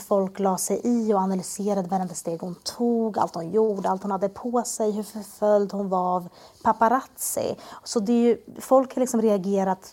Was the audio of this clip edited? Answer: no; 0 cuts

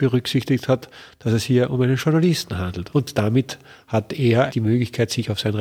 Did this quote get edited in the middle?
yes; 2 cuts; at 2.9 s, 4.5 s

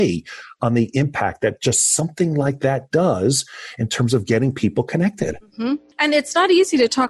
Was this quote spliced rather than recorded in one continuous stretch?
no; 0 cuts

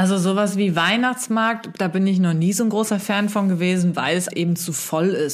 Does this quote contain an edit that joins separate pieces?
yes; 1 cut; at 4.3 s

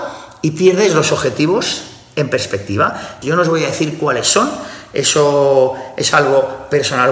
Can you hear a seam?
yes; 1 cut; at 3.2 s

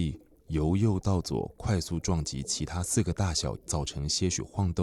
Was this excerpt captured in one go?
no; 1 cut; at 3.6 s

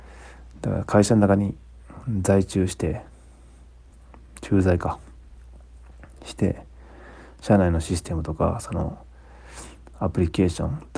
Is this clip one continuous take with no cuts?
yes; 0 cuts

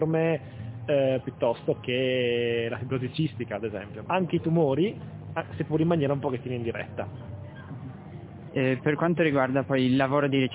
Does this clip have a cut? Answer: yes; 1 cut; at 4.1 s

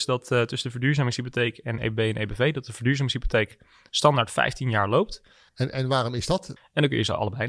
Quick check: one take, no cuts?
no; 2 cuts; at 5.5 s, 6.6 s

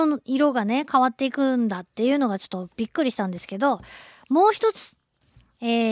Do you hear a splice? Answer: no; 0 cuts

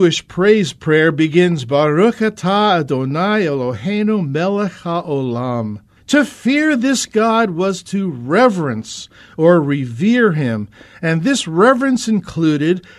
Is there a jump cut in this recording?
yes; 1 cut; at 6.0 s

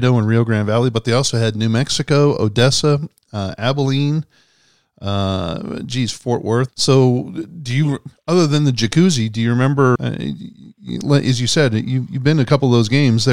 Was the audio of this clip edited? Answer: yes; 2 cuts; at 6.7 s, 10.0 s

